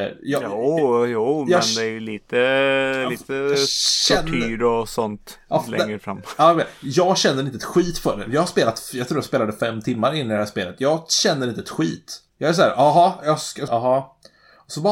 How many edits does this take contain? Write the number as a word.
two